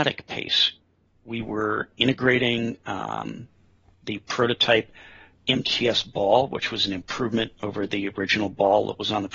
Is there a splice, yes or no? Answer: no